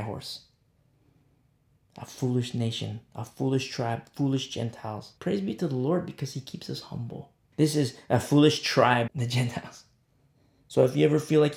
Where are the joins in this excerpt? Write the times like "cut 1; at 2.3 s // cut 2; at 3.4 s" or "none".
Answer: cut 1; at 5.2 s // cut 2; at 7.5 s // cut 3; at 9.1 s